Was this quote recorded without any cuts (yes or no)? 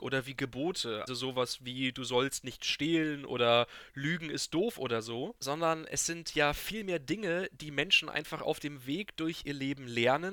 no